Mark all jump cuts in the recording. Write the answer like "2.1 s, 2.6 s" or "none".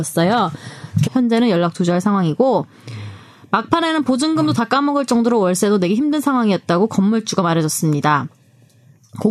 1.0 s